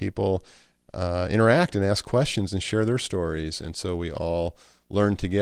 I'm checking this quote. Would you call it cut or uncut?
uncut